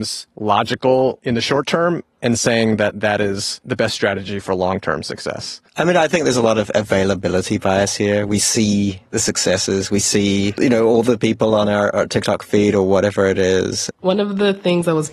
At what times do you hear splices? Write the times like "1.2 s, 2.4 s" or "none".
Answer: 13.9 s